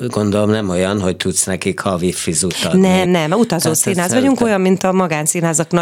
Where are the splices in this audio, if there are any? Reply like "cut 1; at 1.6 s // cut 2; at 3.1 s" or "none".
cut 1; at 3.0 s